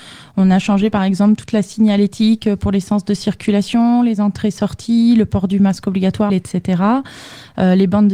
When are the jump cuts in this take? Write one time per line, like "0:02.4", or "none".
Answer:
0:06.3